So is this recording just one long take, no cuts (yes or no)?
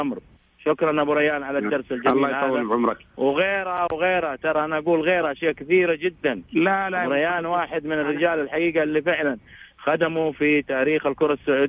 no